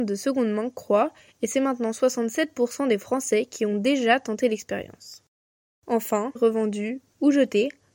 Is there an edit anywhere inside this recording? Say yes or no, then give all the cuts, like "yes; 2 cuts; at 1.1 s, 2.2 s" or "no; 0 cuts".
yes; 1 cut; at 6.4 s